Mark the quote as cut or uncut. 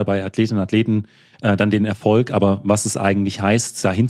uncut